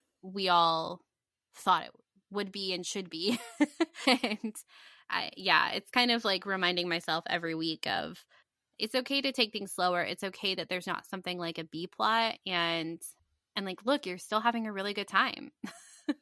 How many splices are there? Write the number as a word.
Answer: one